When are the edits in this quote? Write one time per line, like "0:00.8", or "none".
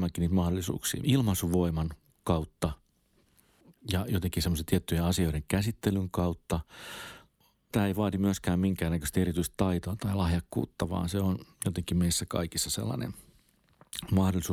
0:01.0
0:07.7

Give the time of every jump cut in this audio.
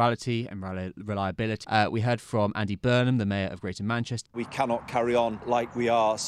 0:01.6
0:04.3

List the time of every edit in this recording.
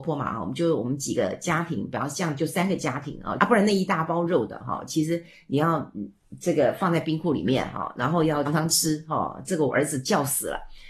0:03.4
0:08.5

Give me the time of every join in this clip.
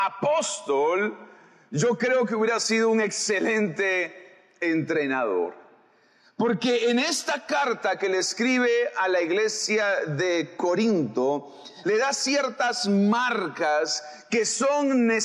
0:11.8

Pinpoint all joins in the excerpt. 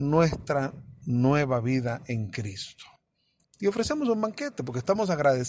0:03.4

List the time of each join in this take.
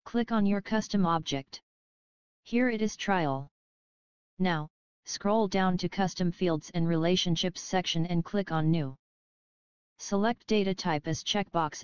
none

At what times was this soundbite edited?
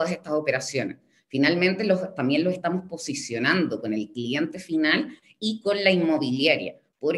none

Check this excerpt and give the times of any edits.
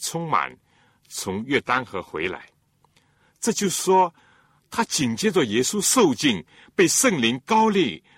none

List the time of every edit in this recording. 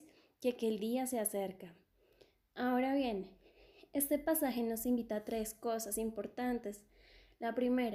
none

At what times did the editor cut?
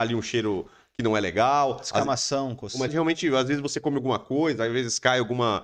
0:02.9

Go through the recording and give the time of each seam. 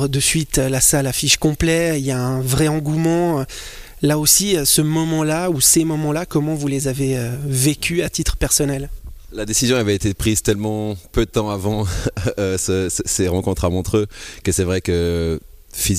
none

